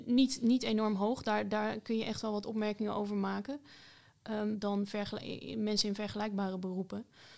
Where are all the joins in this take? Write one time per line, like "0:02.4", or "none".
0:04.5